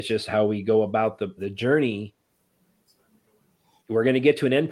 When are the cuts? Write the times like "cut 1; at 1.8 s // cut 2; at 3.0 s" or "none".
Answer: cut 1; at 1.4 s